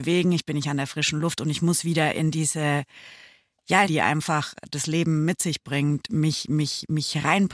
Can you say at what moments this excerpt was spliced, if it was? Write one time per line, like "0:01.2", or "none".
0:03.8